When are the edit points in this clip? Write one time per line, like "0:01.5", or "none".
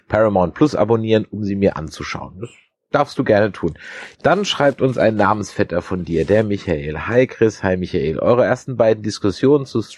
0:04.1

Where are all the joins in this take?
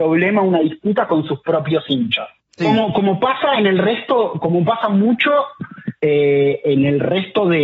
0:02.6

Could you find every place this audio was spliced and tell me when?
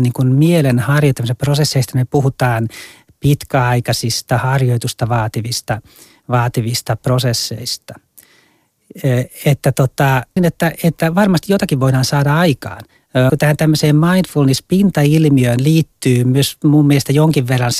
0:10.4
0:13.3

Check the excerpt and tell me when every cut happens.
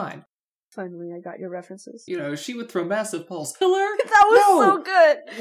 0:02.1
0:03.6

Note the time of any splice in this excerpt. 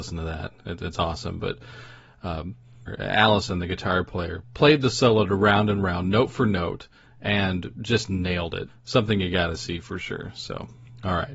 0:08.7

